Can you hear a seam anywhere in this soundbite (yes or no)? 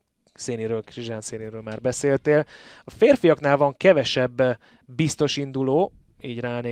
no